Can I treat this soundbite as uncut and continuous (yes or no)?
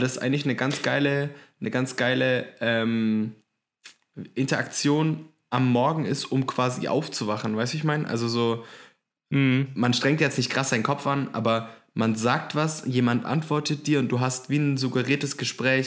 yes